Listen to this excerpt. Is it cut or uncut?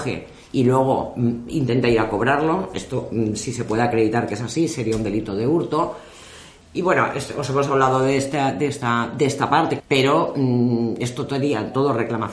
cut